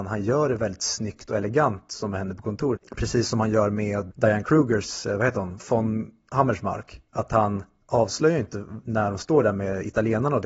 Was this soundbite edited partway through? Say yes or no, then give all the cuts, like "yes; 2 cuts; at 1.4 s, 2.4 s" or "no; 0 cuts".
yes; 2 cuts; at 2.8 s, 4.1 s